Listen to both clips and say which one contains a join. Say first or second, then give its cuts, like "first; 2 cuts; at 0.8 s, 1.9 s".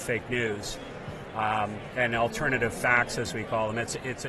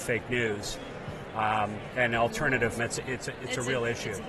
second; 1 cut; at 2.8 s